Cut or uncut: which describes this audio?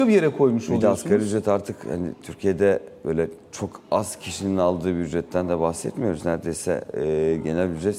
uncut